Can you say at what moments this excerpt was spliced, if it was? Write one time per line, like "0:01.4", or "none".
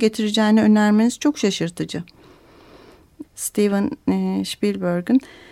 0:03.2